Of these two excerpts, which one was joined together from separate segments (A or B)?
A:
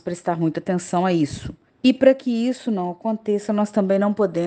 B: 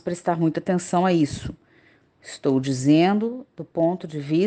A